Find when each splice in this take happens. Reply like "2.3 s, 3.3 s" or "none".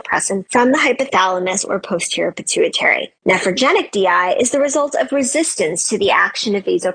3.2 s